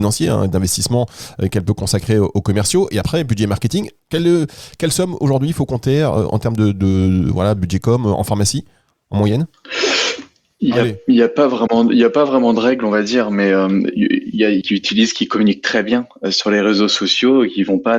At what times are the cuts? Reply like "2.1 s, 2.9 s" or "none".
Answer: 4.0 s, 14.6 s